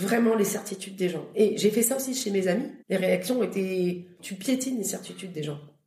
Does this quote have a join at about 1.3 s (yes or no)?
no